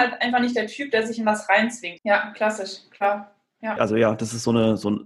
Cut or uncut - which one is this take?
cut